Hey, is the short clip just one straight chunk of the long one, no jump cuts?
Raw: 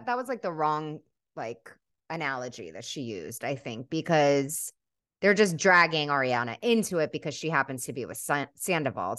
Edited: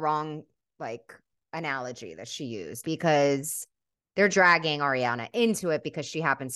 no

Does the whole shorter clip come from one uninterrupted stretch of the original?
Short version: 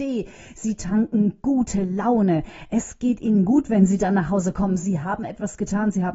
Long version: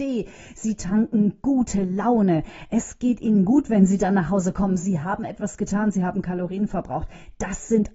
yes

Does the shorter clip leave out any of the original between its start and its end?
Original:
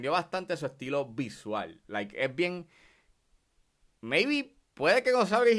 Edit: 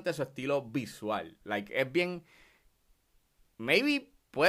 no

